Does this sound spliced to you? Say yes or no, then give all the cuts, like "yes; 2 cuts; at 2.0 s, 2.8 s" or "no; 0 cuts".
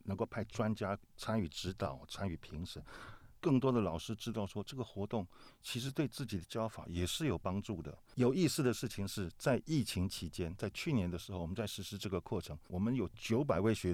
yes; 3 cuts; at 3.4 s, 8.1 s, 12.7 s